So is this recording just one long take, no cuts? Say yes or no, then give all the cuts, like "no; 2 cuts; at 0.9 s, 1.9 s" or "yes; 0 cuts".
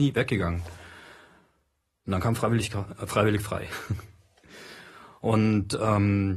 yes; 0 cuts